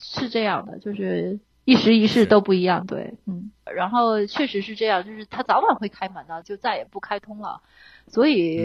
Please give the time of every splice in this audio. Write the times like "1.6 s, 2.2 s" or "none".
3.7 s, 6.4 s